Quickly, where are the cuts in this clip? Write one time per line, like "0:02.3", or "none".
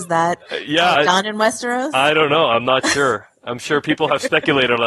0:00.9